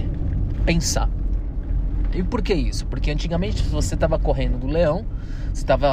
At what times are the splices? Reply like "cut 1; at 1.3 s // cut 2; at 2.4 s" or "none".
none